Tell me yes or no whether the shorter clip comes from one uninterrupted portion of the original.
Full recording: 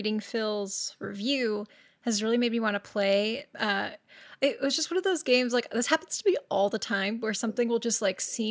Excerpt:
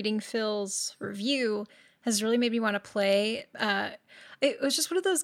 yes